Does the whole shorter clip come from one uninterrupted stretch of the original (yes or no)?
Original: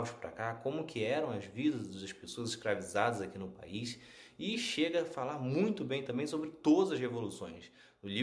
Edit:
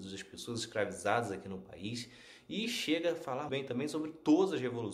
no